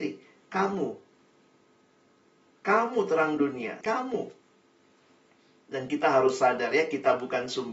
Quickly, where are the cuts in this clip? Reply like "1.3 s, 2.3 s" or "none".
3.8 s